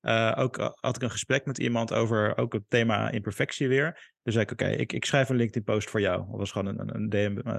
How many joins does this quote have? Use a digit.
0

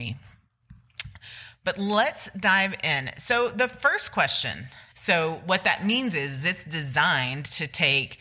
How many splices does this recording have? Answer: 1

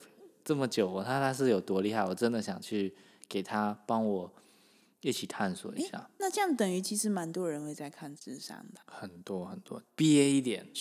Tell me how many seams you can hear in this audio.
2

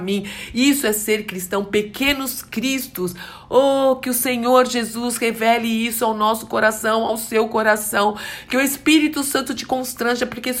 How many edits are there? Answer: 0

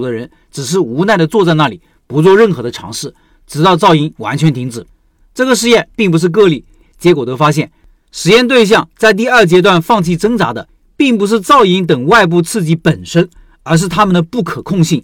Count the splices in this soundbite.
1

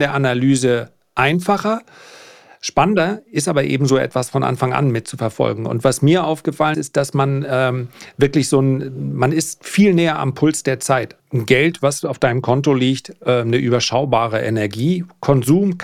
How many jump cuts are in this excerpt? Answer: 2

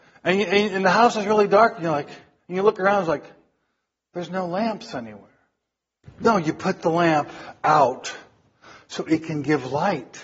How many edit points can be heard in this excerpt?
1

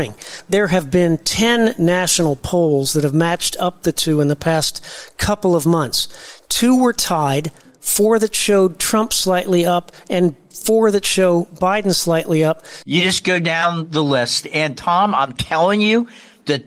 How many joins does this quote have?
1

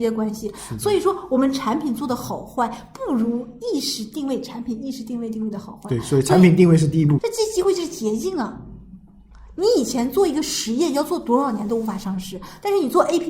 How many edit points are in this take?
1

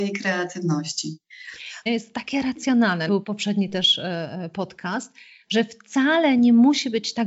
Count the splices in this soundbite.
2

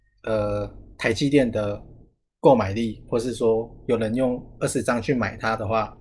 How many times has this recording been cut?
0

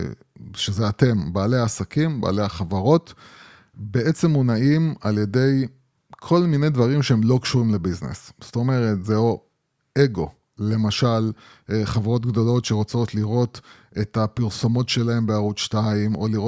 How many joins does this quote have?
0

